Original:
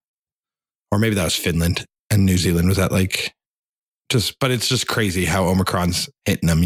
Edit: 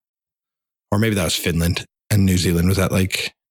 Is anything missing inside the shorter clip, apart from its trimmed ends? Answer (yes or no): no